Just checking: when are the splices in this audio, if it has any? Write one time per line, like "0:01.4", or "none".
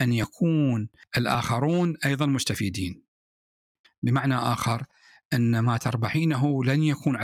0:03.8